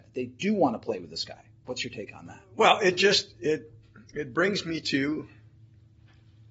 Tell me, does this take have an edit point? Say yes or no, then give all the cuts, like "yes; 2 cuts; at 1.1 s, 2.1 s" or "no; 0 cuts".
no; 0 cuts